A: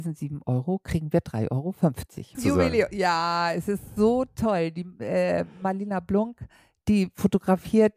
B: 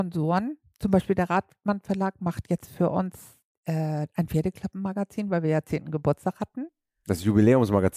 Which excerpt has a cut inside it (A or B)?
A